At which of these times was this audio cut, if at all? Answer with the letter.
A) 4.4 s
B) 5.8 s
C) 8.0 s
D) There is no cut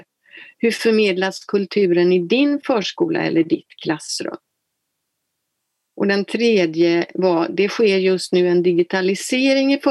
D